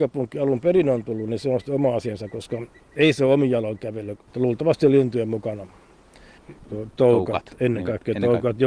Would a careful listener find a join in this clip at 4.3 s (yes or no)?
yes